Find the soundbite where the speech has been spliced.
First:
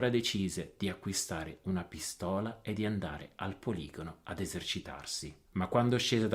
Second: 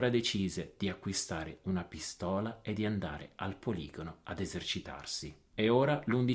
first; 1 cut; at 5.4 s

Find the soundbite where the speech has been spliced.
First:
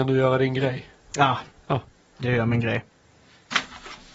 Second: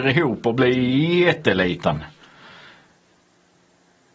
first; 1 cut; at 1.5 s

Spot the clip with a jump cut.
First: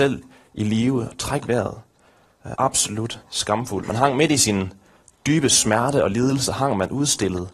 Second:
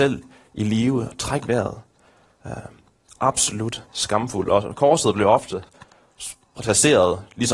first; 2 cuts; at 2.5 s, 3.8 s

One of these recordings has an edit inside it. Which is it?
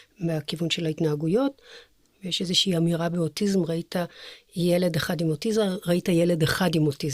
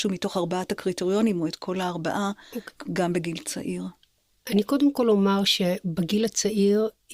first; 1 cut; at 2.1 s

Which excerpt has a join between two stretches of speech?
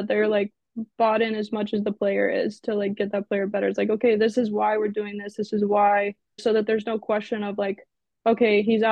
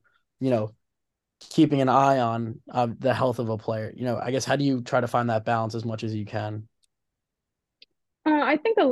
first; 1 cut; at 6.4 s

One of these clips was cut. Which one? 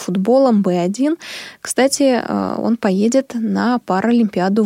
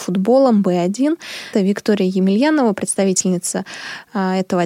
second; 1 cut; at 1.5 s

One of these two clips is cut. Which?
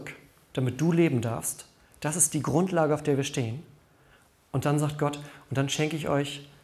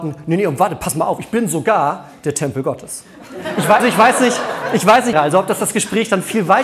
second; 2 cuts; at 3.8 s, 5.1 s

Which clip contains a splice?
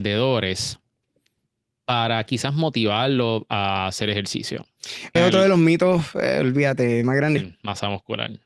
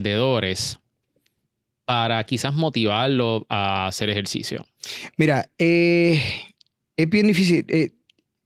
first; 2 cuts; at 5.2 s, 7.4 s

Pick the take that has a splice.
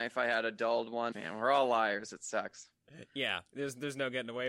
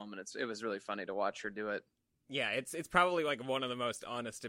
first; 1 cut; at 1.1 s

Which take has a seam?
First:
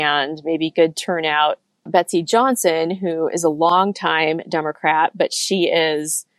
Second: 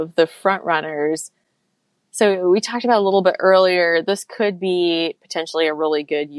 first; 1 cut; at 1.9 s

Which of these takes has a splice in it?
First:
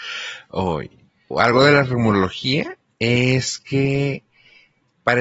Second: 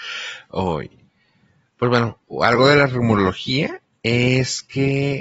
first; 1 cut; at 1.3 s

